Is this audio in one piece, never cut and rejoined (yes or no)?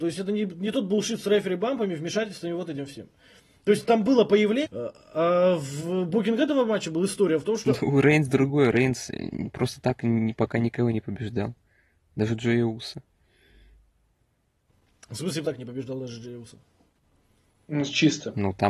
no